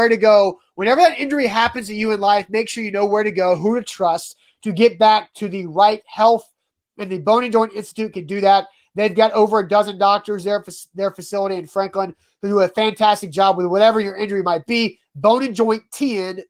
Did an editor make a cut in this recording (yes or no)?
no